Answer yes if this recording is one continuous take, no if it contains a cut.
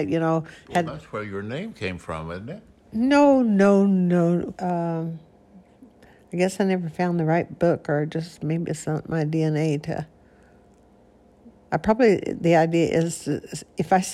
no